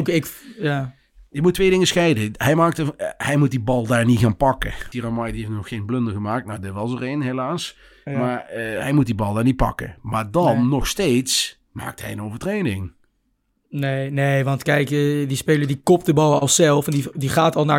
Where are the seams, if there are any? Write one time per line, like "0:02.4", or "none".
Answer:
0:04.9